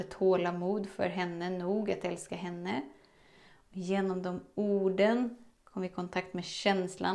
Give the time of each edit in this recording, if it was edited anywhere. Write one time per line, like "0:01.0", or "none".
none

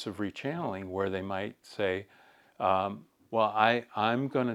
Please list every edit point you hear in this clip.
none

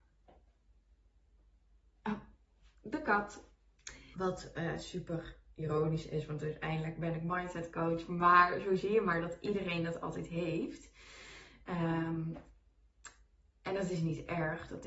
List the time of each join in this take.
0:04.1

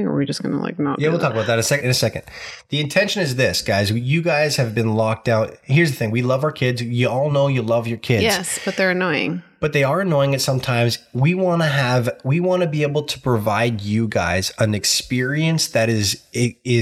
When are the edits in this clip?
0:01.8

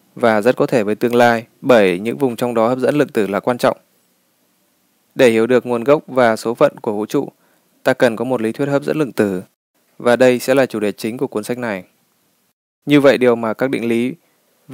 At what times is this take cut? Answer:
0:01.5
0:12.8

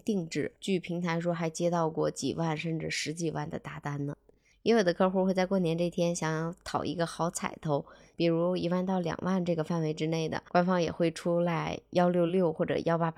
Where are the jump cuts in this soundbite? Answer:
0:12.3

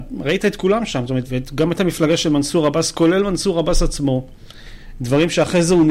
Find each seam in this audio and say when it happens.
0:01.2

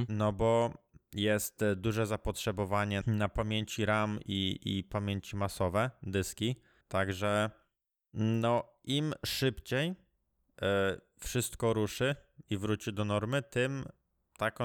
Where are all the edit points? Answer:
0:03.0
0:06.8

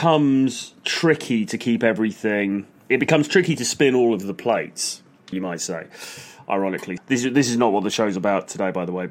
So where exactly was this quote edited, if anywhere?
0:05.3
0:07.0

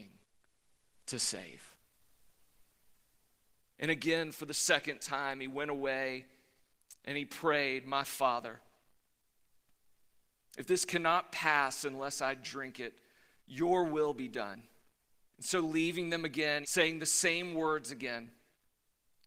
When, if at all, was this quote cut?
0:15.2
0:16.6

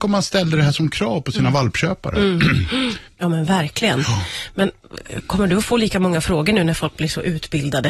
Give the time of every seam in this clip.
0:03.1

